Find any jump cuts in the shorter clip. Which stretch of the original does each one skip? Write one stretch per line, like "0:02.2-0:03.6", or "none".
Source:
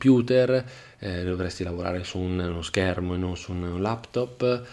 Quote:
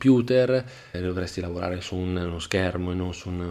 0:00.9-0:01.2